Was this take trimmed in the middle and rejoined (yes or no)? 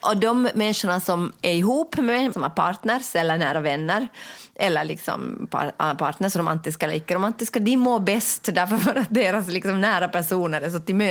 yes